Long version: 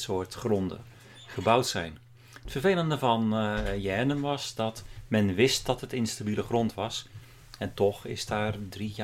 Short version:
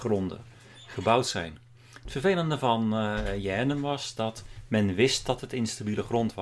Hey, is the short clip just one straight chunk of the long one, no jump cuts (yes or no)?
yes